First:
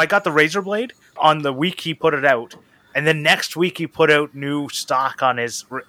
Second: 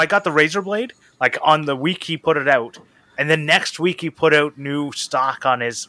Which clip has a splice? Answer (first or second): first